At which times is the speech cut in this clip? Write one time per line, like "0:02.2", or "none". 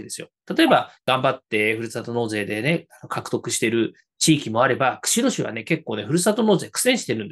0:01.0